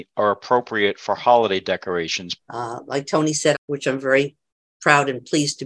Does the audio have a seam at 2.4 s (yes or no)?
yes